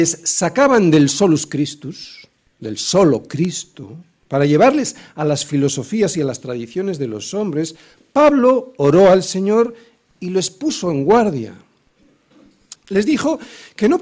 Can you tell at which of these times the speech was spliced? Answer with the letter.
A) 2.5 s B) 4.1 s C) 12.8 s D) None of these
C